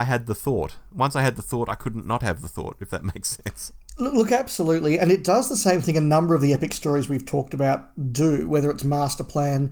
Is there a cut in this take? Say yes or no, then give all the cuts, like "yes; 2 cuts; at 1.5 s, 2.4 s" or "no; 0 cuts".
no; 0 cuts